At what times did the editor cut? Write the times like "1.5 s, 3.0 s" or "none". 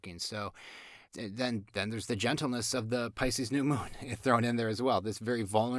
1.0 s